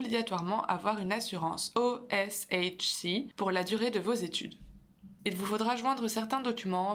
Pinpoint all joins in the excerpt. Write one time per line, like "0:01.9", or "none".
0:03.3
0:05.2